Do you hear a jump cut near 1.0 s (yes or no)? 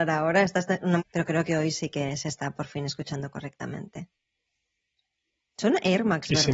yes